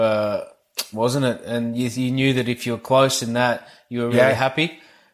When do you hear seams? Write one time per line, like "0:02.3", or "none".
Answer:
0:00.9
0:04.1

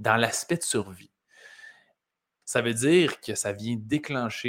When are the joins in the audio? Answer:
0:02.4

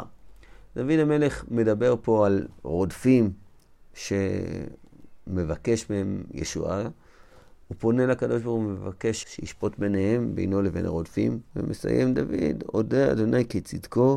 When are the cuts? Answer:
0:09.2
0:11.5

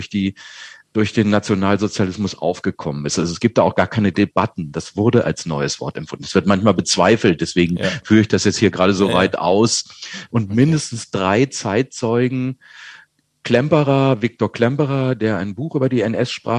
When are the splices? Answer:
0:10.3

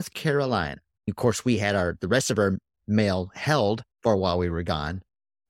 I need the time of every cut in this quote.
0:01.0
0:03.9

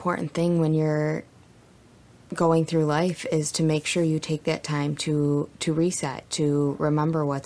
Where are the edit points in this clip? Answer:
none

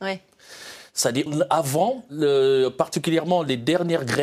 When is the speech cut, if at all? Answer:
0:01.3

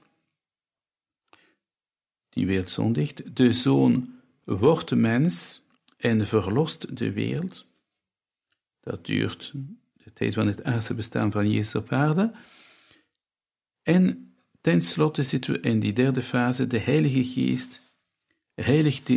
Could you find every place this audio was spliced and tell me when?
none

